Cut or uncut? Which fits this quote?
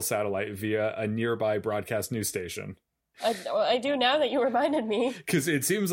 cut